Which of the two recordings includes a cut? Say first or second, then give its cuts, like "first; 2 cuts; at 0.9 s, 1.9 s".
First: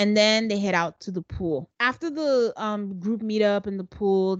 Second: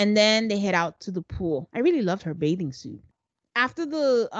first; 1 cut; at 1.7 s